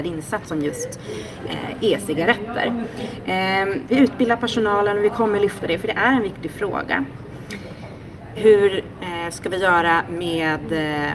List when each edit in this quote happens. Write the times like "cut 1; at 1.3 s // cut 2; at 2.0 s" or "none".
cut 1; at 3.9 s // cut 2; at 8.3 s